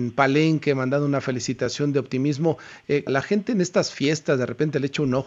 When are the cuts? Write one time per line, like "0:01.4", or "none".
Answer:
0:03.1